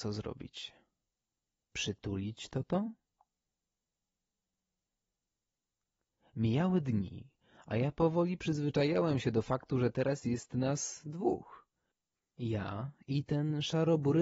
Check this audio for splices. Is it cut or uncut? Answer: uncut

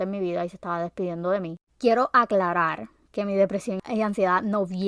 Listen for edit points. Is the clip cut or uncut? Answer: cut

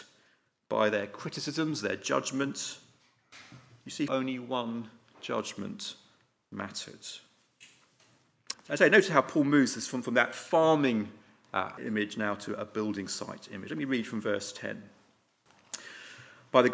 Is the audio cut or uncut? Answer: cut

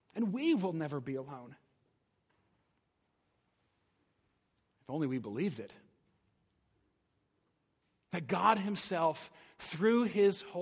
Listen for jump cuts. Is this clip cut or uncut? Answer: uncut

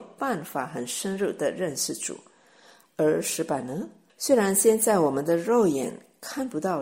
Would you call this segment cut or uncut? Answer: cut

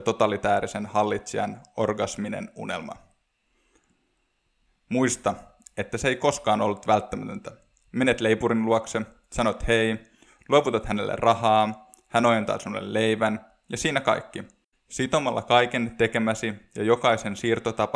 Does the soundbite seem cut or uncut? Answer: cut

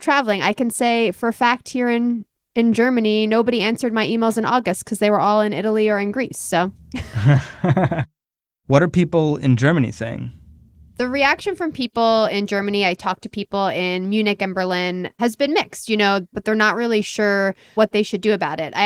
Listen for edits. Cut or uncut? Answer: cut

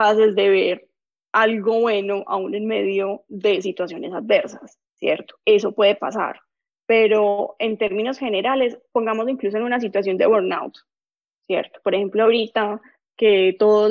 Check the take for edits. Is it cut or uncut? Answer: cut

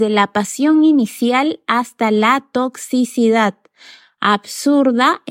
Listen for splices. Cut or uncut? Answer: uncut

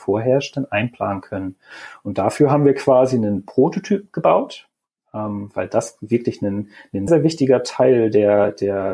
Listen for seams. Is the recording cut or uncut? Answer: cut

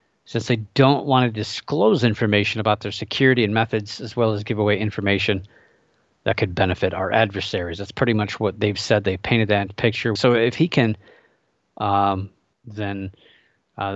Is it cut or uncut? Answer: cut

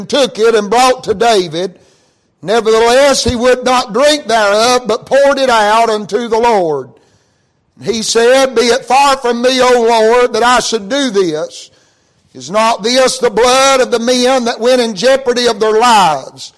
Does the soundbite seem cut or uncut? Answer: uncut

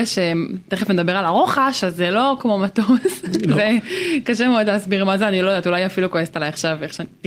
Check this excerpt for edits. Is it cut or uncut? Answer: uncut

